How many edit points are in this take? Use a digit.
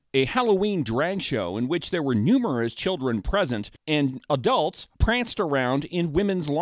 2